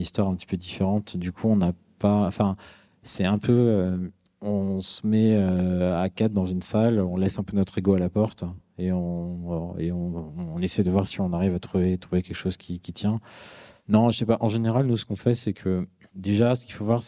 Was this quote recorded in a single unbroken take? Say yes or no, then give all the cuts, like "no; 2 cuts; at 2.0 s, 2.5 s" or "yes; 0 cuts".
yes; 0 cuts